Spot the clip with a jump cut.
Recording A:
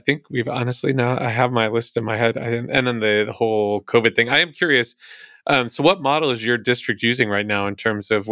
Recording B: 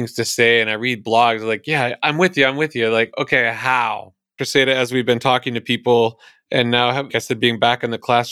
B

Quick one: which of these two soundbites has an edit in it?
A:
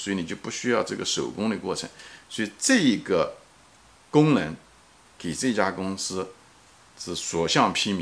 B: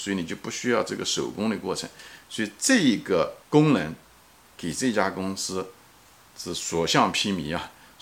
B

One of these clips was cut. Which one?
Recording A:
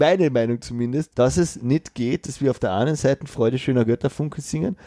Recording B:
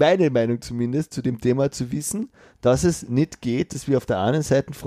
A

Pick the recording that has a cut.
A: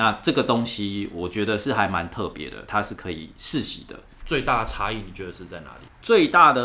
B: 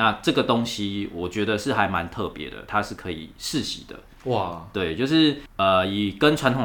A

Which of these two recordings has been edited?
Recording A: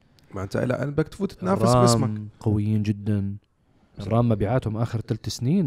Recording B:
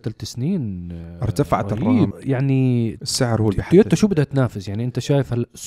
B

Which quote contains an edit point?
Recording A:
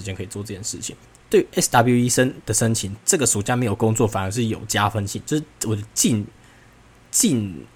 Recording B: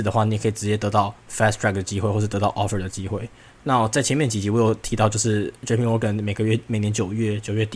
A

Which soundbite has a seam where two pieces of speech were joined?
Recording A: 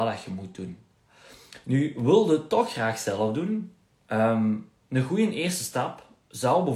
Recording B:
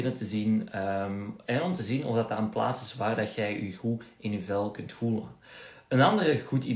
A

